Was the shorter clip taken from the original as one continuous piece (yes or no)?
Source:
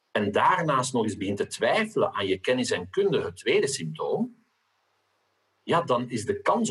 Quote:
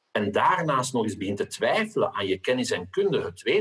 yes